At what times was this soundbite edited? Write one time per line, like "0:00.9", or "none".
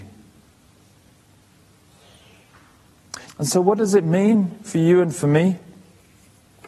0:03.3